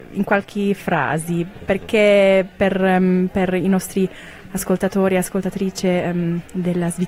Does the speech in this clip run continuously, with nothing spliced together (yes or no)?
yes